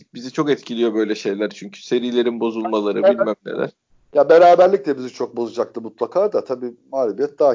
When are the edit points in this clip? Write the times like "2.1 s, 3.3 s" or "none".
none